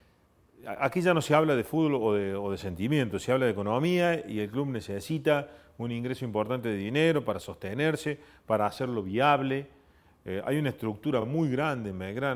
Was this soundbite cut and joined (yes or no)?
no